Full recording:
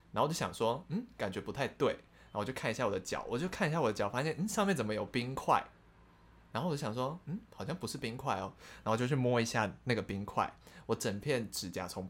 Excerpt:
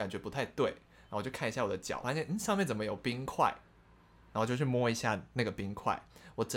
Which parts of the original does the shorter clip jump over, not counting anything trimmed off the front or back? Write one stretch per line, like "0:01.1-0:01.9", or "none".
0:03.2-0:04.1
0:06.4-0:08.8